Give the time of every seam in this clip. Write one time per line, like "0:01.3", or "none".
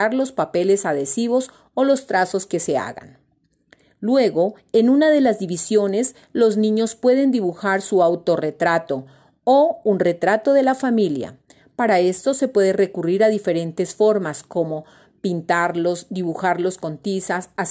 none